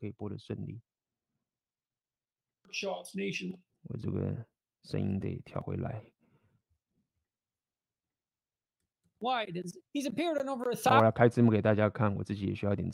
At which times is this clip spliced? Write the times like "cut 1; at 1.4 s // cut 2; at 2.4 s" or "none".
cut 1; at 3.7 s // cut 2; at 9.9 s